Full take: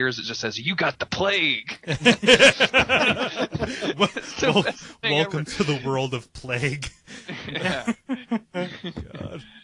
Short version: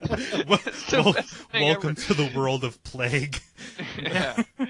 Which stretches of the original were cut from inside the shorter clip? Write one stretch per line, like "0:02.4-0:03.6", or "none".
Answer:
none